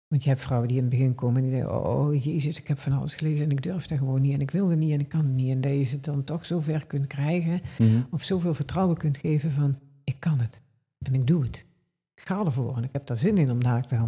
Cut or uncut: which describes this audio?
uncut